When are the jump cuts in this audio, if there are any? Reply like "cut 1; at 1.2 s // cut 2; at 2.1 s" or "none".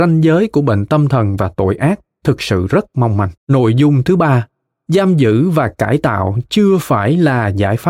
cut 1; at 3.4 s